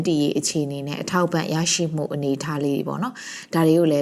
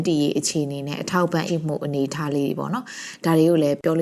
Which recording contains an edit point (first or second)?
second